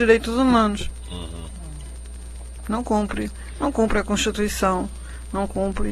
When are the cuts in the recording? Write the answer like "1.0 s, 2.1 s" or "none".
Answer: none